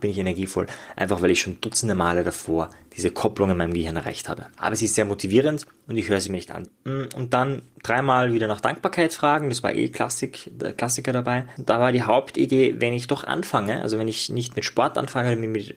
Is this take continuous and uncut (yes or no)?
no